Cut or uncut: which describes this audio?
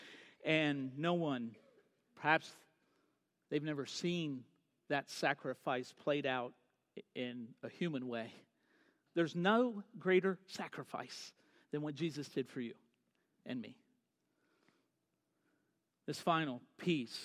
cut